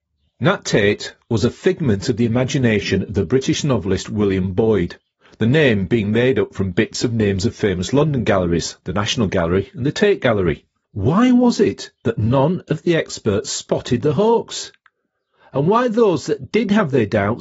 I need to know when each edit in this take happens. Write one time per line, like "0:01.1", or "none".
0:10.8